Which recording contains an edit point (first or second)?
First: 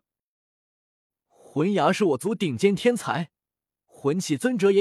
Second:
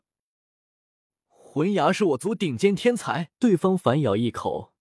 second